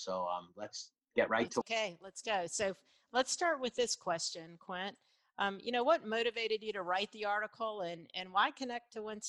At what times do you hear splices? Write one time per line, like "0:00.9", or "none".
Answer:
0:01.6

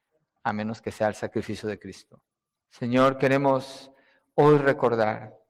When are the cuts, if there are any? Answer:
0:02.6

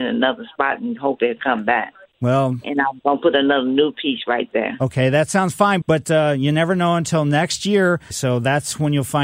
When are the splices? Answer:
0:05.8
0:08.1

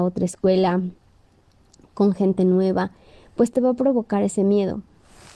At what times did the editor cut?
none

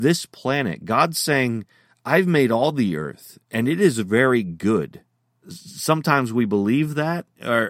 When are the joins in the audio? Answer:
0:05.4

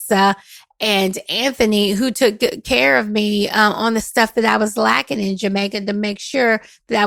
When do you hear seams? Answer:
none

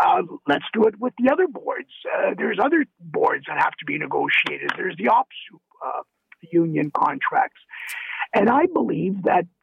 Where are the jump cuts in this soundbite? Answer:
none

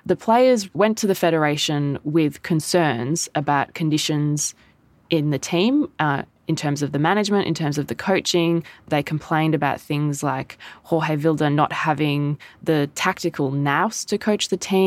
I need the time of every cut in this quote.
none

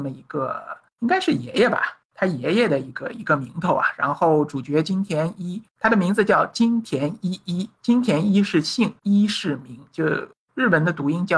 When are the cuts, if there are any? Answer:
none

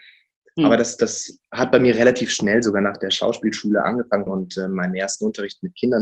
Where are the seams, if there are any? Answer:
0:04.3

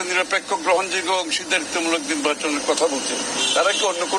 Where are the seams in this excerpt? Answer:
none

